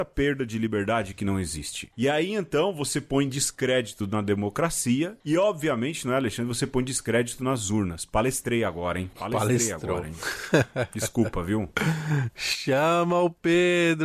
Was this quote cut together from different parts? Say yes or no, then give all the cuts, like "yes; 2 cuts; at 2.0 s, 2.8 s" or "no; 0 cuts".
no; 0 cuts